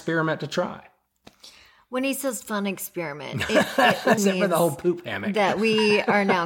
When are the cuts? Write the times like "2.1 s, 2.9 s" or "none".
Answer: 4.2 s